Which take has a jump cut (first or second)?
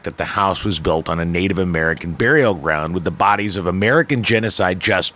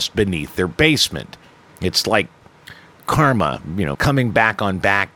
second